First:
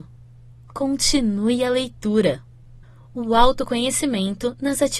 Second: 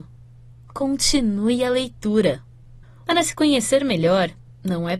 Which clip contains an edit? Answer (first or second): second